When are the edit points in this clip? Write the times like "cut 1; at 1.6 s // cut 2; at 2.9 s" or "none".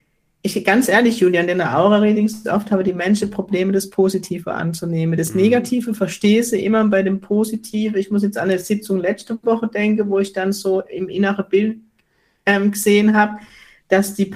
none